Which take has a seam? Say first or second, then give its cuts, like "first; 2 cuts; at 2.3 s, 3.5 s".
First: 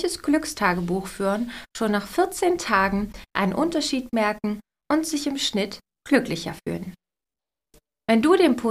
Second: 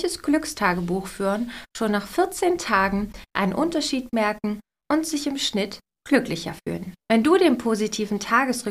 second; 1 cut; at 7.0 s